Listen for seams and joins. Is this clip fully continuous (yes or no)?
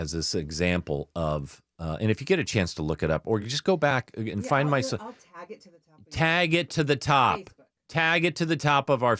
yes